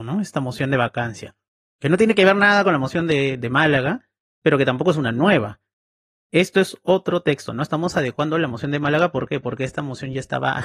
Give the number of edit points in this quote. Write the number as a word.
zero